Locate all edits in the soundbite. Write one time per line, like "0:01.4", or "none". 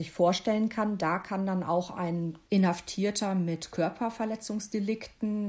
0:02.4